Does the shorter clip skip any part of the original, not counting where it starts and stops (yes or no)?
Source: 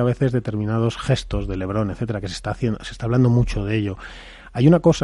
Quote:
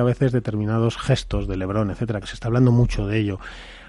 yes